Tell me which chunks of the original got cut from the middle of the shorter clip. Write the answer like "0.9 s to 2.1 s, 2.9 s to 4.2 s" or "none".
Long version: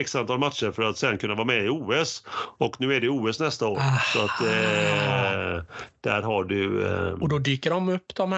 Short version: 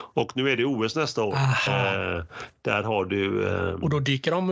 4.1 s to 5.1 s

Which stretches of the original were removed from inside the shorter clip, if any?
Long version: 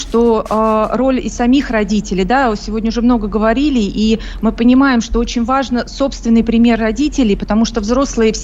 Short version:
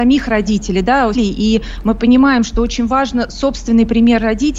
2.6 s to 3.7 s

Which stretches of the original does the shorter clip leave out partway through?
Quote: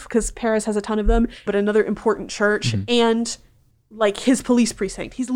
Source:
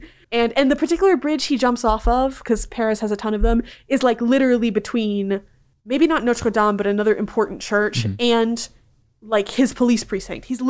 3.8 s to 6.8 s

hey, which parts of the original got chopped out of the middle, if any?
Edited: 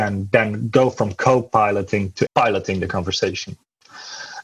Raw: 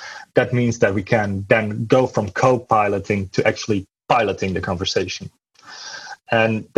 3.4 s to 4.0 s

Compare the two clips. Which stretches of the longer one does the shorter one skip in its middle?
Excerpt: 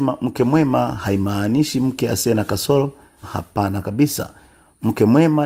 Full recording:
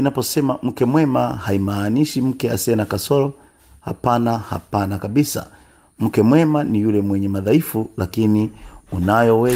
3.6 s to 4.4 s

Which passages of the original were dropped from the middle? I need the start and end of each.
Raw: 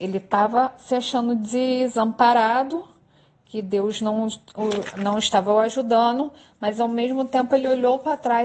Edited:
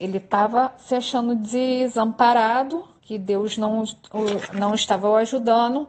3.0 s to 3.4 s

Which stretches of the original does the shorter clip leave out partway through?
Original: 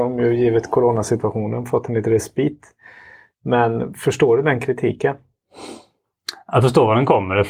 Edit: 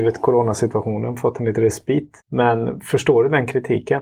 2.7 s to 3.3 s

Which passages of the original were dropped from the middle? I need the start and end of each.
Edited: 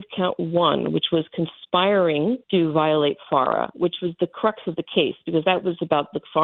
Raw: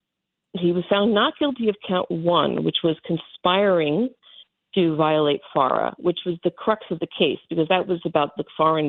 4.2 s to 4.7 s

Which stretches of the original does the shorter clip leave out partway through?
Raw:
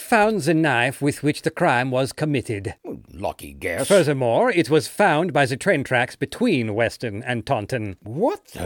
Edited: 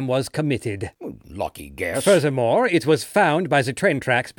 none

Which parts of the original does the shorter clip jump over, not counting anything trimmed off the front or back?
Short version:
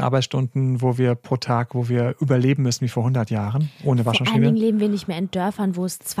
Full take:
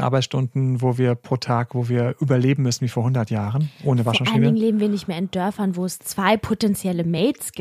none

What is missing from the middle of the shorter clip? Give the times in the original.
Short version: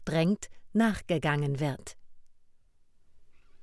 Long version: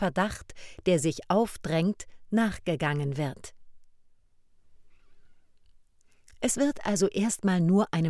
none

